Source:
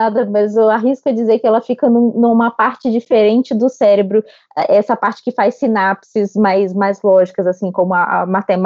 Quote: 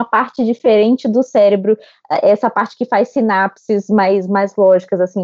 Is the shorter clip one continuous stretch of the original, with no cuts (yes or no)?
yes